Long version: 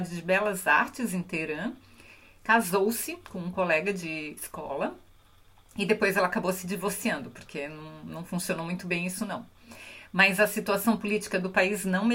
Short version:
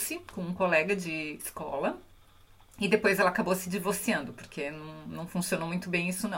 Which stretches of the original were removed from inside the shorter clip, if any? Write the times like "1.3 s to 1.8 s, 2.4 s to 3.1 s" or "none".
none